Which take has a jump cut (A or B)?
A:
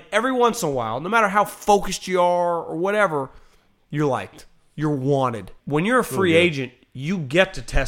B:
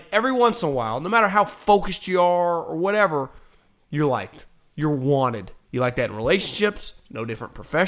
A